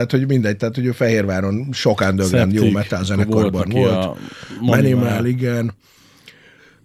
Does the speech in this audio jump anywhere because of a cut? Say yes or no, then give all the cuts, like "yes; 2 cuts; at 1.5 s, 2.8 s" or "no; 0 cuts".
no; 0 cuts